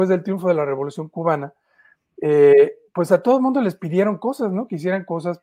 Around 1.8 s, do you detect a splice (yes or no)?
no